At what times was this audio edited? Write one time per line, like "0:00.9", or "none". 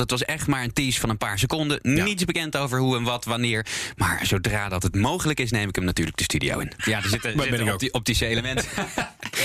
0:06.8